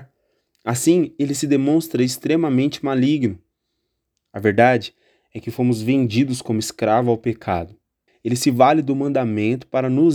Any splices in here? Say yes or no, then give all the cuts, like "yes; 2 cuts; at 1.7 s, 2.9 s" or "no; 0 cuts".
yes; 1 cut; at 8.1 s